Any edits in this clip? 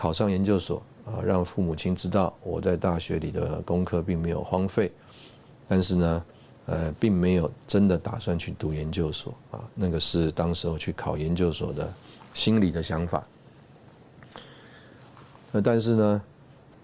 no; 0 cuts

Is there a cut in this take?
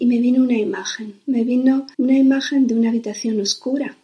yes; 1 cut; at 1.9 s

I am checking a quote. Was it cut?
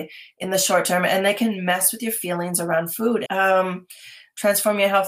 yes; 1 cut; at 3.3 s

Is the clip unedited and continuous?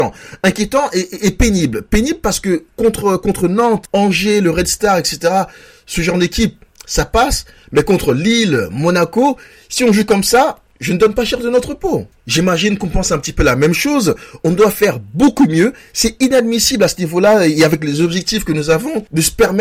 yes; 0 cuts

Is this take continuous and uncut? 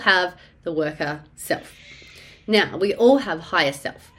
yes; 0 cuts

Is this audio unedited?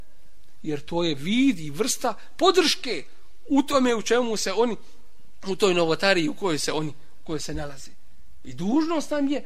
yes; 0 cuts

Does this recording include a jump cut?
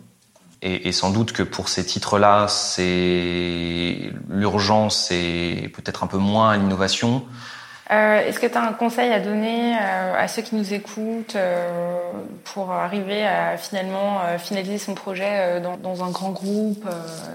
yes; 2 cuts; at 7.8 s, 15.7 s

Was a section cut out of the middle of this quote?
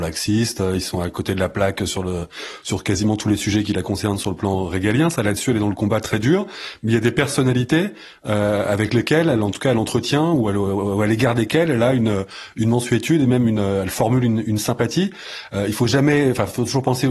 no; 0 cuts

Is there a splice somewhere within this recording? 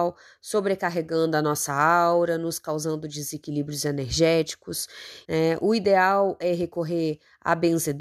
yes; 1 cut; at 5.2 s

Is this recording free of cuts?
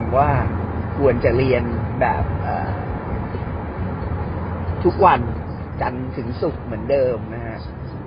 yes; 0 cuts

